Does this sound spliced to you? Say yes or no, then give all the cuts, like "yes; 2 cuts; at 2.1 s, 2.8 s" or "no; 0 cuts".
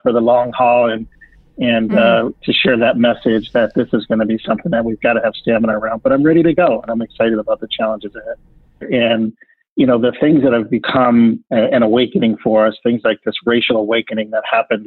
yes; 1 cut; at 8.8 s